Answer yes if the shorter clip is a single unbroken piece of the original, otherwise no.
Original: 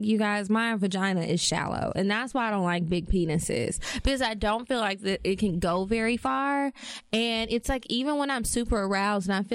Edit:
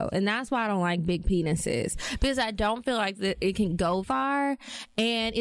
no